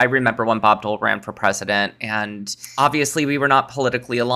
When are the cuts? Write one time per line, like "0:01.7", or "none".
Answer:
none